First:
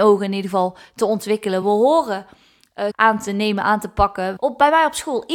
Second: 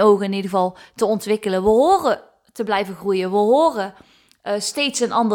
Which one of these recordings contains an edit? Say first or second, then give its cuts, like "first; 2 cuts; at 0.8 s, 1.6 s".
first; 3 cuts; at 1.6 s, 2.9 s, 4.4 s